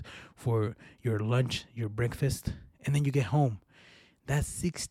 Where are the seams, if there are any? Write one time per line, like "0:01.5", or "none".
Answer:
none

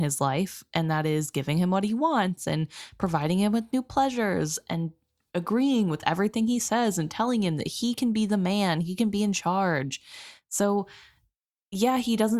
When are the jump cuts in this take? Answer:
none

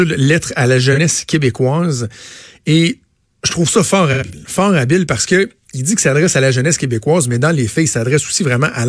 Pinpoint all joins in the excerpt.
none

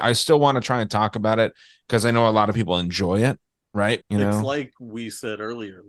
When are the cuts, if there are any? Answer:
0:04.0

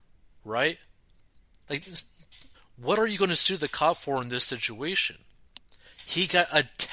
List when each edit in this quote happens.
0:02.5

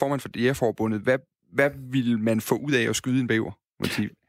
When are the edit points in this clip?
none

